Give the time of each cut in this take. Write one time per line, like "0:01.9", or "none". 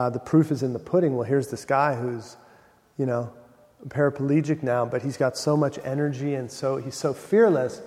none